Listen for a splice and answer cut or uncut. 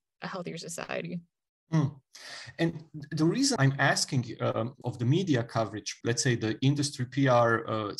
cut